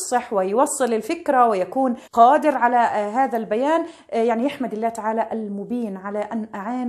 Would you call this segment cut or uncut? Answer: cut